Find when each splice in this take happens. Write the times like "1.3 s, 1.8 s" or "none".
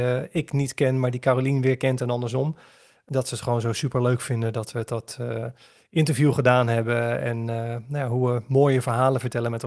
none